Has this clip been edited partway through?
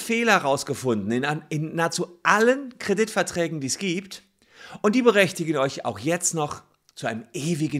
no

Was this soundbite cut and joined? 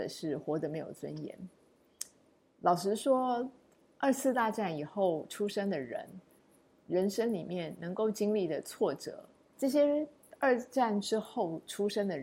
yes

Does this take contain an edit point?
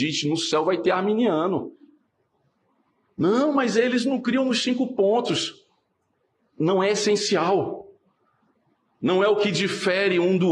no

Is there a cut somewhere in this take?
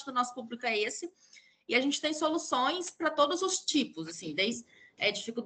no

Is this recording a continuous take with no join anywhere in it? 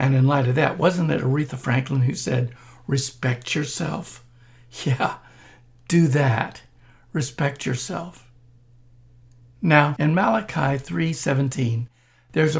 yes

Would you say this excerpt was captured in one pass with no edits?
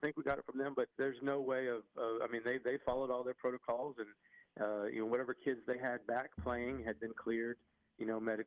no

